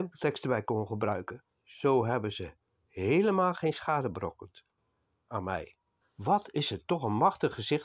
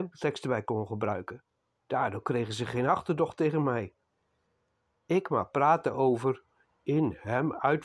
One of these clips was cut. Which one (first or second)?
first